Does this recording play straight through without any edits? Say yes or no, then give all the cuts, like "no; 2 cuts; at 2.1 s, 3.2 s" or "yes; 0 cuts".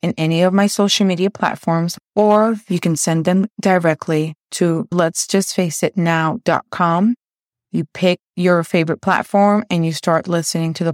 yes; 0 cuts